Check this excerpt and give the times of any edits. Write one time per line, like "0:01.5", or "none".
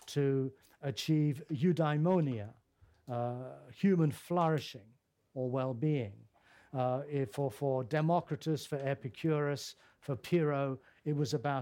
none